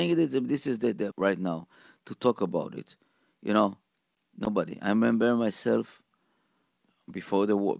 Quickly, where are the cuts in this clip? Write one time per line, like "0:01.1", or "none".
0:01.1